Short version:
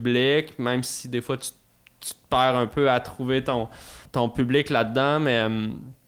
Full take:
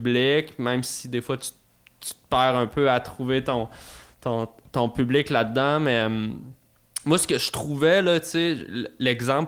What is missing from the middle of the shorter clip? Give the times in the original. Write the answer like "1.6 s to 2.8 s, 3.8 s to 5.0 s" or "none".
4.1 s to 4.7 s